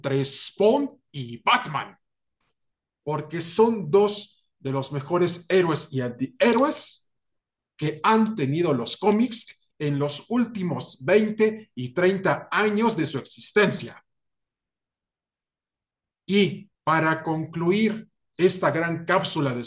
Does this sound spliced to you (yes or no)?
yes